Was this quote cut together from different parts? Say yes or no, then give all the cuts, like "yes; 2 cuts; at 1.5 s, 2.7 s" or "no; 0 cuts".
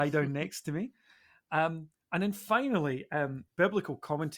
no; 0 cuts